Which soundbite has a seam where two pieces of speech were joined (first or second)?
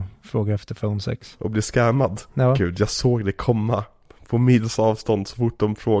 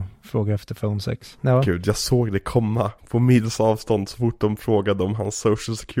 second